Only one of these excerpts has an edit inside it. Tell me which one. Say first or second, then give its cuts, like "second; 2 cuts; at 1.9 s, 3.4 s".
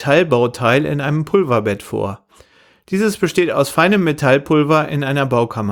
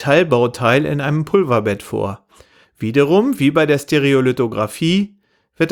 second; 1 cut; at 2.6 s